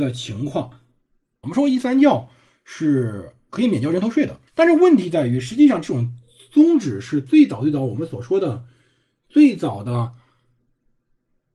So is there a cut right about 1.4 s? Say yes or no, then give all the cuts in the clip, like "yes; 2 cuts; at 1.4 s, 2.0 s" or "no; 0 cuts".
yes; 2 cuts; at 1.4 s, 4.5 s